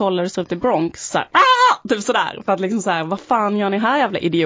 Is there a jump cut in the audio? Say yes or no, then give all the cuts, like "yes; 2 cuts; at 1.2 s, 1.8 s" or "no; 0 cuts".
yes; 1 cut; at 1.1 s